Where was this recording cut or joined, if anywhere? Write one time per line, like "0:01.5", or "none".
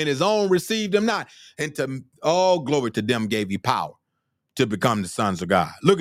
0:02.9